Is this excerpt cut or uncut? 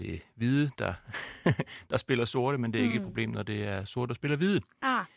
uncut